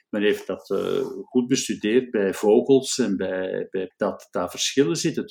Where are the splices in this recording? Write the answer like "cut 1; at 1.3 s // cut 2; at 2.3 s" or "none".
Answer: cut 1; at 3.9 s